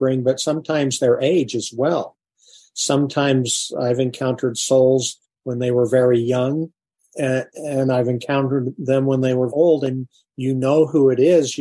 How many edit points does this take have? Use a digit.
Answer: 2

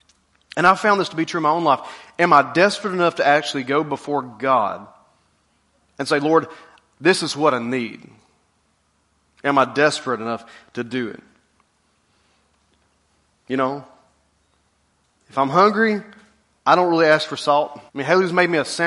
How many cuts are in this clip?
1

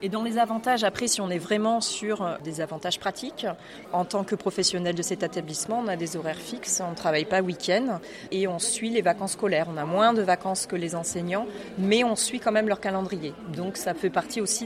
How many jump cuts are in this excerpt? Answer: 0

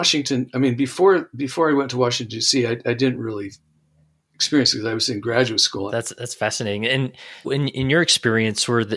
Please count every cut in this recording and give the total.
2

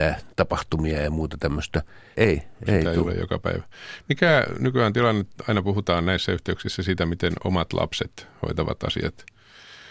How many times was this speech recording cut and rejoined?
1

